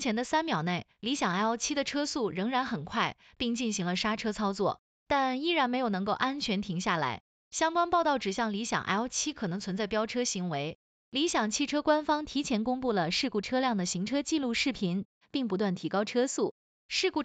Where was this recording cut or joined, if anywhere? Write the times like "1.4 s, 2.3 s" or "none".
7.4 s, 15.2 s